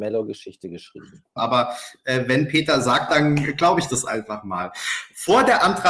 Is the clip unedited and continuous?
no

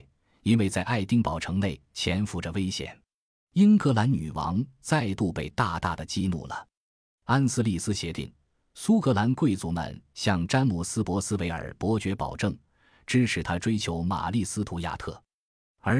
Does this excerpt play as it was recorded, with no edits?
no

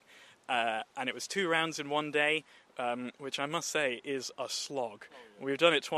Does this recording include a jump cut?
no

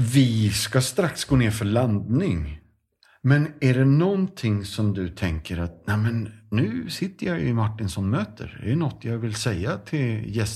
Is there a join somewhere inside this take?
no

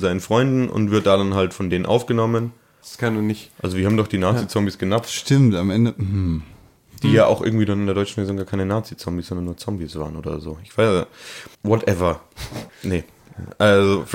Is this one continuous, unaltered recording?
no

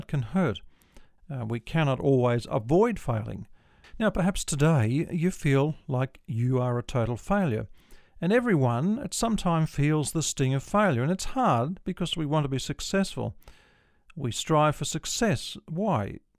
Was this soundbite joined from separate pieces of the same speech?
yes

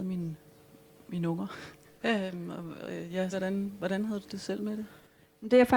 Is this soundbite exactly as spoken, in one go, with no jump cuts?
no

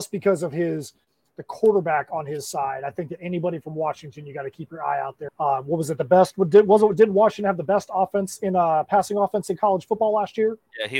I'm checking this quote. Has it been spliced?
yes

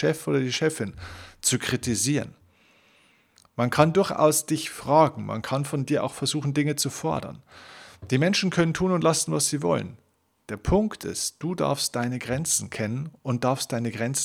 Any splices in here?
no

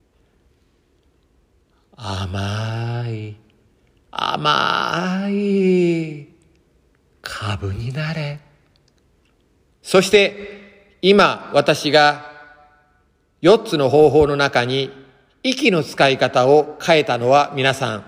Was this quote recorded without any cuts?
no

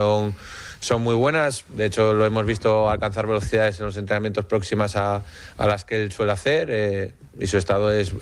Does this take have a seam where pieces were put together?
no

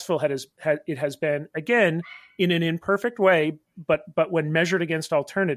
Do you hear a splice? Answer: no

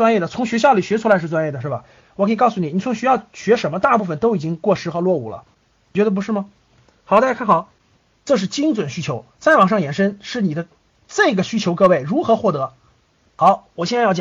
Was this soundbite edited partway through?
no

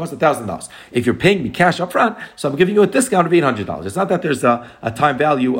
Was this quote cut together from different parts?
no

